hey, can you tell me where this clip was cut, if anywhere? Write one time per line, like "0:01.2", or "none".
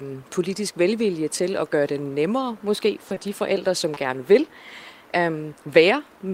none